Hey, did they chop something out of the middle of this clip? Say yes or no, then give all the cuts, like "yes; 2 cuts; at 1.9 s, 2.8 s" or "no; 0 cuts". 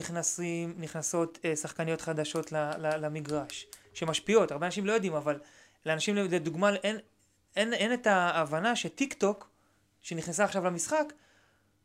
no; 0 cuts